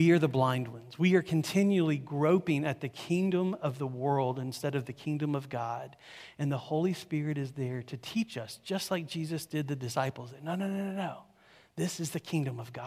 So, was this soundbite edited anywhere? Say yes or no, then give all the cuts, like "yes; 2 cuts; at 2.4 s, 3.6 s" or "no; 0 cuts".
no; 0 cuts